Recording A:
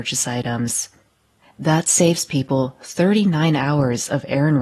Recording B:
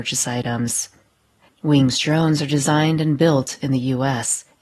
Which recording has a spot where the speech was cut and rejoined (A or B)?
B